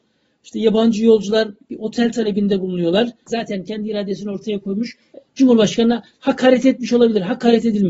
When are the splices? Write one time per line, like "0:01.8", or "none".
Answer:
0:03.3